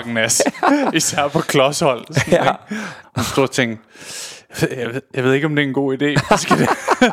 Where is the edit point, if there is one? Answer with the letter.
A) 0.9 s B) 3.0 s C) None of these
B